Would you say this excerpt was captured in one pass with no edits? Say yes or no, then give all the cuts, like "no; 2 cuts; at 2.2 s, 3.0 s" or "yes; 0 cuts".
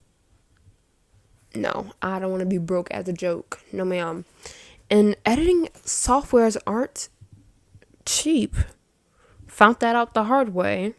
yes; 0 cuts